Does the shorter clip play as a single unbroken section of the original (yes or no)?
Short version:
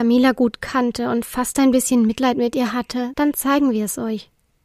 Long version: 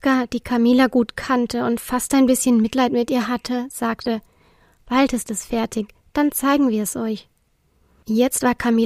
no